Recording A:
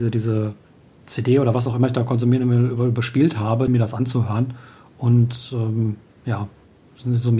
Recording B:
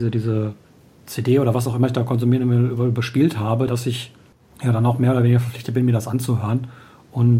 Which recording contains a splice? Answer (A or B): A